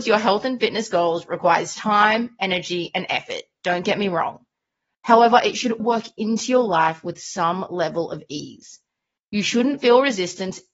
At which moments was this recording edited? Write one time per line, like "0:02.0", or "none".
0:05.8